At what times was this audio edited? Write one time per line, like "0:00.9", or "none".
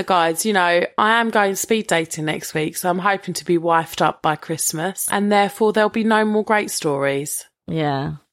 0:05.1